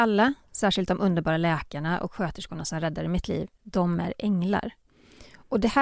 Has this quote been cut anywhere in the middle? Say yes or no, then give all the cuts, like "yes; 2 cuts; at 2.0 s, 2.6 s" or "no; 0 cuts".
no; 0 cuts